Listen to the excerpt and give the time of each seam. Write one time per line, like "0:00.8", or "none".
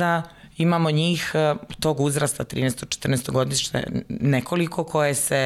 none